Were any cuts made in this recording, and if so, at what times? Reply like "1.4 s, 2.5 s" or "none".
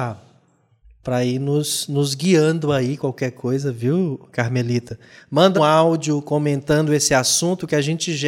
5.5 s